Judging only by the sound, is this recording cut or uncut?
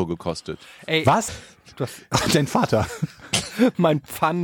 cut